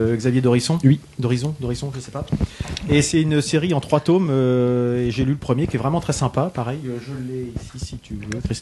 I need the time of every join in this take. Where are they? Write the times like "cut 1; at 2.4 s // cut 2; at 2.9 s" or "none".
none

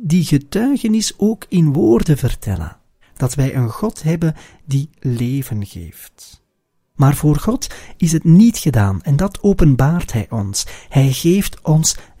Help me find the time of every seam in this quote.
cut 1; at 3.0 s // cut 2; at 7.0 s

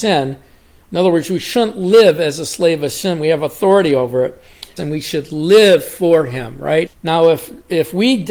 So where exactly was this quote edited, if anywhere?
cut 1; at 4.8 s // cut 2; at 6.9 s

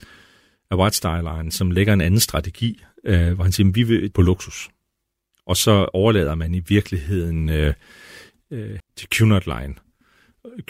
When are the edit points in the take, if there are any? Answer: cut 1; at 4.1 s // cut 2; at 8.8 s

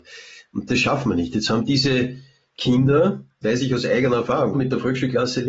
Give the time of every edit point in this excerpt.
cut 1; at 3.4 s // cut 2; at 4.5 s

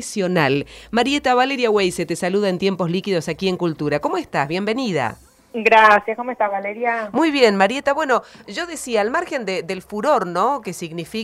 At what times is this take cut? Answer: none

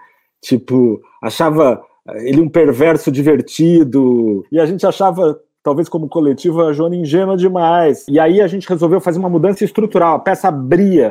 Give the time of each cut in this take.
cut 1; at 8.1 s

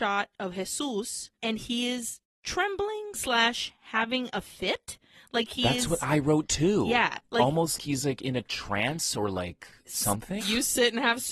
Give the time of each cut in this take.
cut 1; at 7.8 s // cut 2; at 10.4 s

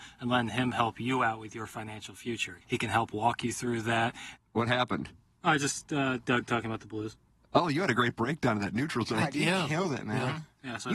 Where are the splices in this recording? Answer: cut 1; at 2.6 s // cut 2; at 4.4 s

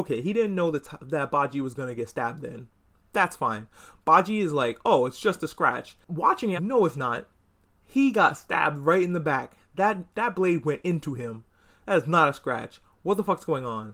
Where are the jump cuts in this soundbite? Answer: cut 1; at 6.6 s

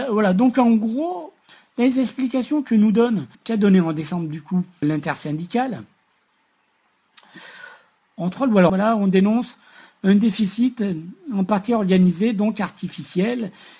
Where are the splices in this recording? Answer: cut 1; at 3.3 s // cut 2; at 4.8 s // cut 3; at 8.7 s

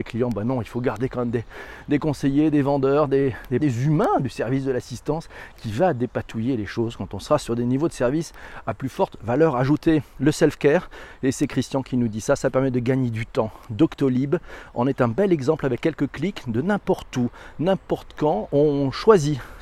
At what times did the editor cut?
cut 1; at 3.6 s

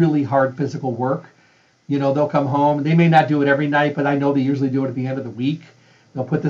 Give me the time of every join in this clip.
none

